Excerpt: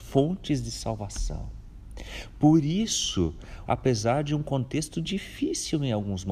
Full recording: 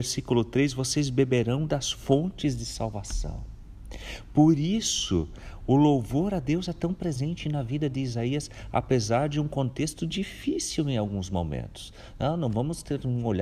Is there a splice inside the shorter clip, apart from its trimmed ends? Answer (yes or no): yes